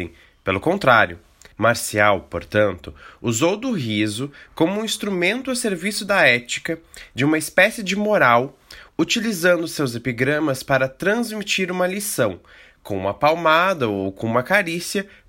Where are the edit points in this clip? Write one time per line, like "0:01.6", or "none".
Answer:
0:01.5